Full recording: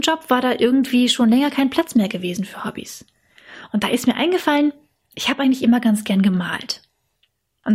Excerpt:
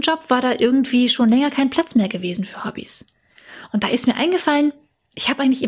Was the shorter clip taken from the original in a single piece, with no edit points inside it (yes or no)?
yes